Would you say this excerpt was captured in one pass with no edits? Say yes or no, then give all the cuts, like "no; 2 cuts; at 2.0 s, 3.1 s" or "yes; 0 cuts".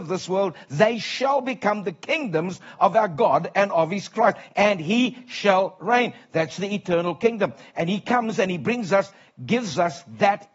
yes; 0 cuts